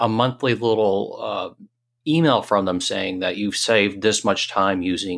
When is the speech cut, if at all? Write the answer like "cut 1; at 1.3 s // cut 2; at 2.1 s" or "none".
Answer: none